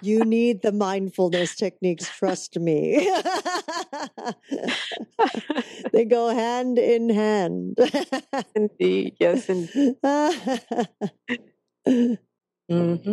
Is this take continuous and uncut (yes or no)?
yes